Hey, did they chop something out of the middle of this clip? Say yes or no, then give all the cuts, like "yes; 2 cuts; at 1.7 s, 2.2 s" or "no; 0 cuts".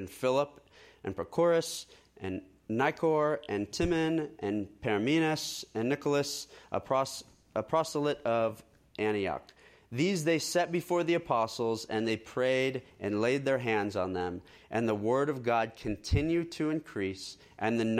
no; 0 cuts